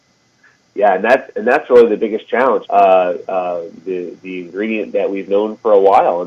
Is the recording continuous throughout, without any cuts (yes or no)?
no